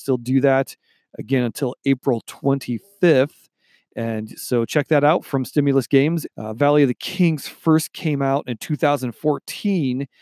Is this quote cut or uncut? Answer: cut